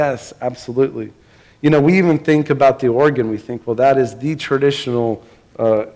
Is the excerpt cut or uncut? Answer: uncut